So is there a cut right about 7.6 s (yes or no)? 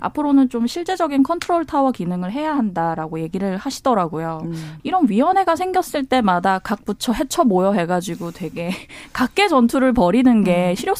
no